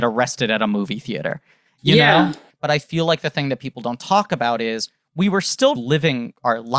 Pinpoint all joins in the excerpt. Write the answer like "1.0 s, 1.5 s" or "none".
2.5 s, 5.7 s